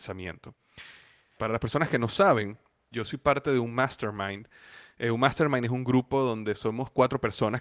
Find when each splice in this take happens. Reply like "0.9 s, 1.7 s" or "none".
1.4 s, 2.9 s